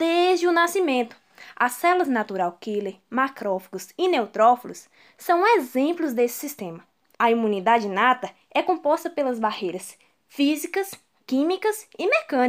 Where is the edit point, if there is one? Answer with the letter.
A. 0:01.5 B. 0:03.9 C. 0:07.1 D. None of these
C